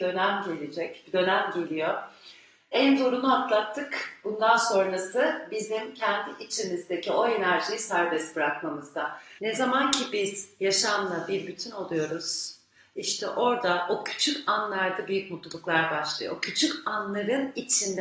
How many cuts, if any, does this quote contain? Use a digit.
1